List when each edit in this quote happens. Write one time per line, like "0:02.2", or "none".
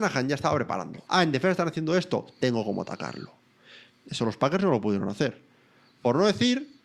0:01.1